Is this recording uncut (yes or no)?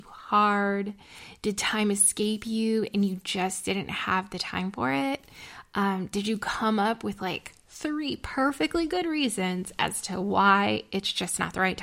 yes